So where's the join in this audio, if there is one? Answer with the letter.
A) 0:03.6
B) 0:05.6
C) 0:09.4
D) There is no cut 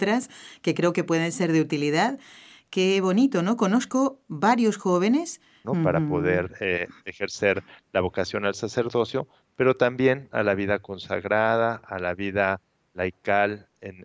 B